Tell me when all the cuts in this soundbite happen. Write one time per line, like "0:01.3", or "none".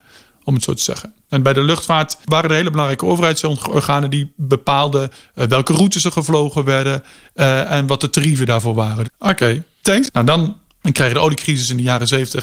0:09.0
0:10.1